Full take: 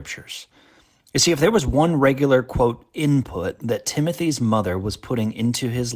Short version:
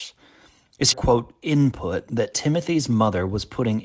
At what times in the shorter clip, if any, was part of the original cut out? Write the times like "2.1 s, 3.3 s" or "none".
0.9 s